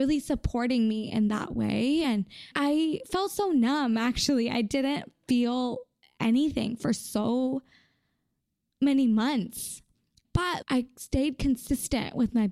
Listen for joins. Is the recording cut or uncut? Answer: uncut